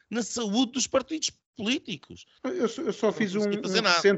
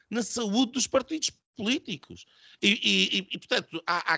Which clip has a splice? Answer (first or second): first